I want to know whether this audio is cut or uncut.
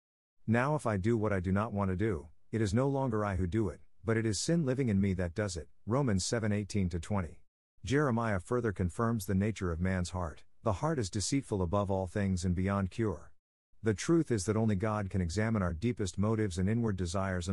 cut